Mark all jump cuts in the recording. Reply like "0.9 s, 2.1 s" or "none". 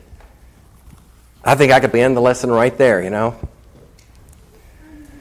1.9 s